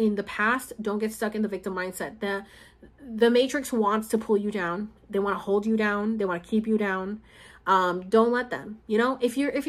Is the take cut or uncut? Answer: uncut